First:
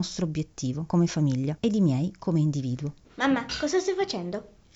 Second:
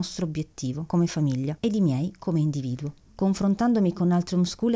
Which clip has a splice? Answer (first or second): first